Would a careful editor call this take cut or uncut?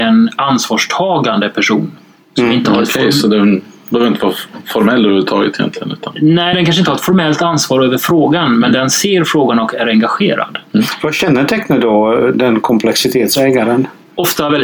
uncut